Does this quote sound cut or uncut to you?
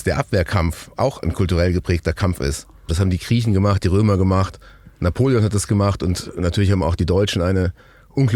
cut